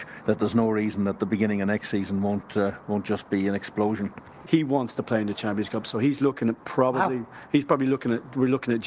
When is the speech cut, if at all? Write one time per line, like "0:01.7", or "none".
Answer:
0:04.4